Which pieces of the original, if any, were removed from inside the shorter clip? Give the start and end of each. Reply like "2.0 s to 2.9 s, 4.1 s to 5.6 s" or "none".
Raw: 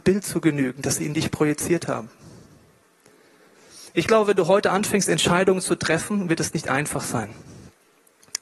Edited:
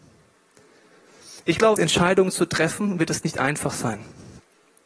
4.2 s to 5.1 s